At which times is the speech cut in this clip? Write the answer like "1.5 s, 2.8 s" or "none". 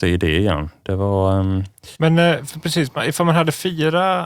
1.9 s